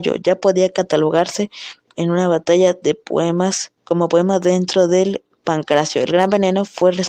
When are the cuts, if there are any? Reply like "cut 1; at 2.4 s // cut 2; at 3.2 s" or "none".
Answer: cut 1; at 3.8 s